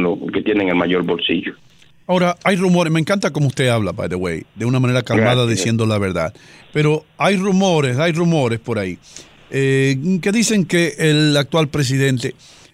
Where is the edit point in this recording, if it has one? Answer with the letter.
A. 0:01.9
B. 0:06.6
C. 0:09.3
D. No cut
B